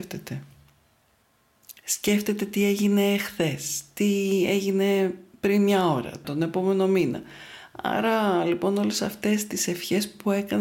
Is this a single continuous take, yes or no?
no